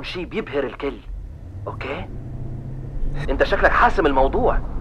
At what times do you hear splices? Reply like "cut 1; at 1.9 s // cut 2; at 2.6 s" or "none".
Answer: cut 1; at 3.2 s